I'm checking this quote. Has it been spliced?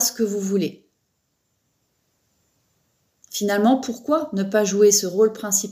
no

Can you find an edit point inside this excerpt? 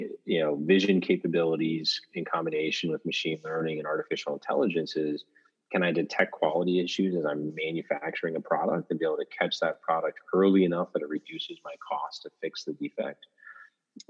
no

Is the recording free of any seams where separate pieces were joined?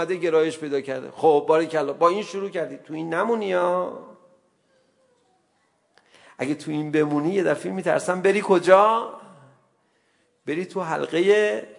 yes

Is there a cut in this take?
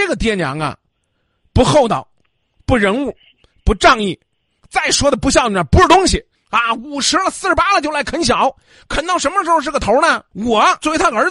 no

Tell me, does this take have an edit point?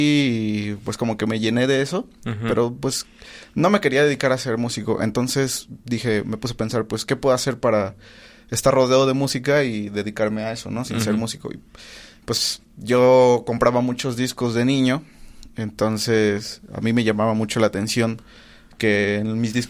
no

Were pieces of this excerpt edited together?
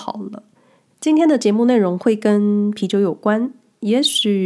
yes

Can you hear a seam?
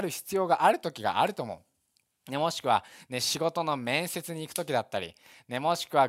no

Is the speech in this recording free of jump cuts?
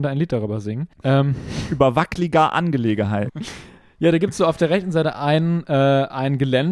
no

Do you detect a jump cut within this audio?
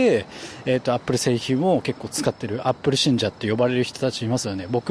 no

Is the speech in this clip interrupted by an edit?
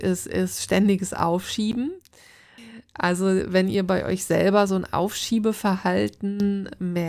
no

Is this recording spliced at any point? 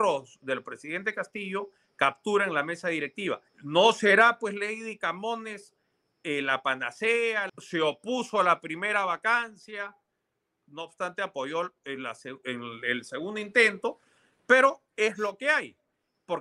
yes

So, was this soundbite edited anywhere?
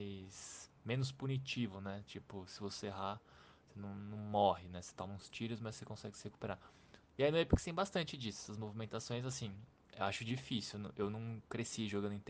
yes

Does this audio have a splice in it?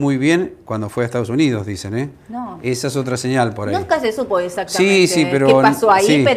no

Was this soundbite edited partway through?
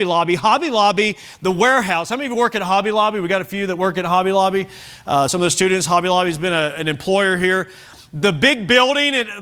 no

